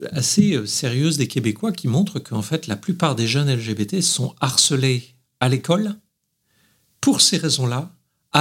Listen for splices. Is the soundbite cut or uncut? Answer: uncut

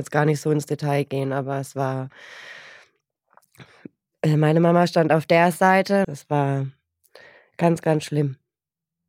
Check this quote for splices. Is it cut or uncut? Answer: cut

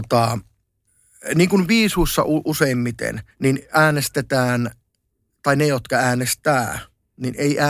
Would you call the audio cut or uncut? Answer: cut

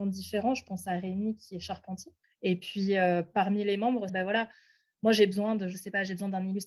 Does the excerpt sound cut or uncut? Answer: cut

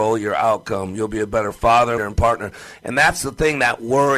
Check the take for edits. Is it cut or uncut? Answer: cut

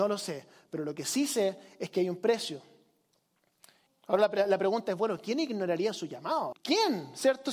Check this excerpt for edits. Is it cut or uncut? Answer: cut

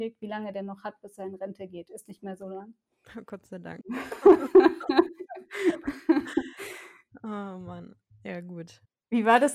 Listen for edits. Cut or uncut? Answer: cut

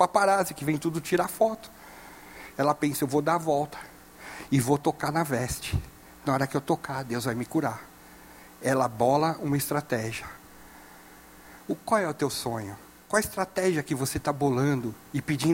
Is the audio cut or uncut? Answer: uncut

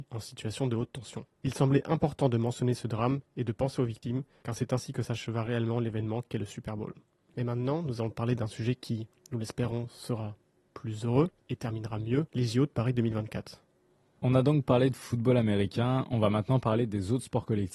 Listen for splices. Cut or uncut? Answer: uncut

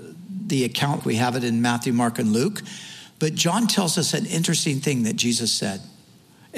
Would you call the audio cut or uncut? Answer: cut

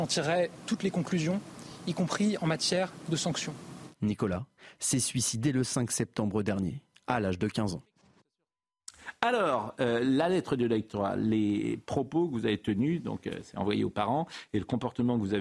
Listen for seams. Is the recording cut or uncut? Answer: uncut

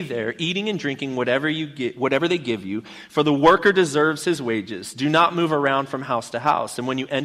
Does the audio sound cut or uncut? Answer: uncut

